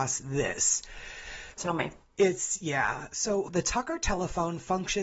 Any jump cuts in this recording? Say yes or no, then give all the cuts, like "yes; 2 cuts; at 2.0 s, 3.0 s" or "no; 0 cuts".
yes; 2 cuts; at 1.6 s, 3.5 s